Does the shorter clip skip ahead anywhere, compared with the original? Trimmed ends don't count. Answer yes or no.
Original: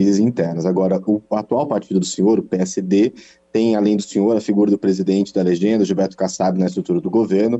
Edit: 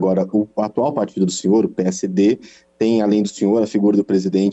no